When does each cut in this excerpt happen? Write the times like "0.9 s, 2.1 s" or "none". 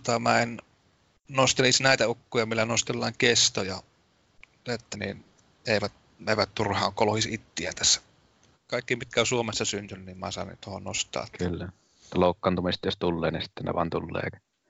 4.9 s, 8.5 s